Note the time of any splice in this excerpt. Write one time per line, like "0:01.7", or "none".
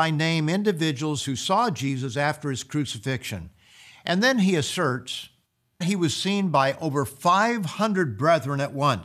0:05.8